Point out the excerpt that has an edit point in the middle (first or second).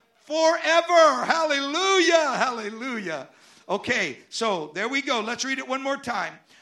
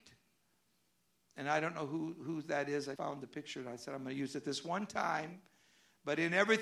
second